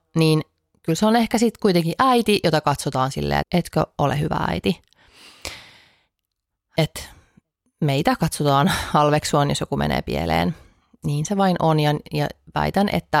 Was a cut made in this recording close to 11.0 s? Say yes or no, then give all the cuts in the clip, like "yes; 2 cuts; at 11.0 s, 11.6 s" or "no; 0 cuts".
no; 1 cut; at 3.4 s